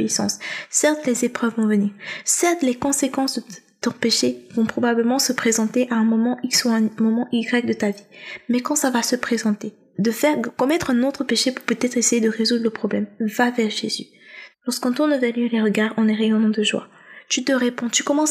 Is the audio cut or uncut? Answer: cut